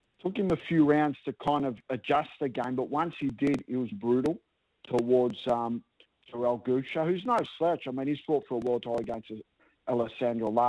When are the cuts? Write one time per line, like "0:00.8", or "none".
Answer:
0:03.9